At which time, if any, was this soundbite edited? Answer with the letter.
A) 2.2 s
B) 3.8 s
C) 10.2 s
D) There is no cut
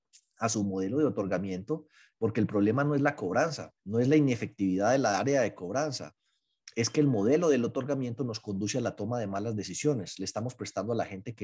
B